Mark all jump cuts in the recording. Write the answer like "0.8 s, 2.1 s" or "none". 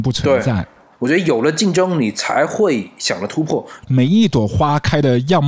0.9 s, 3.8 s